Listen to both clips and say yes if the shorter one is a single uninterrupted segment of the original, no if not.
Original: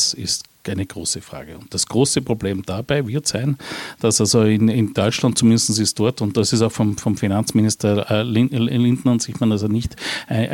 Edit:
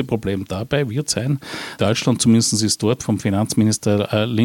no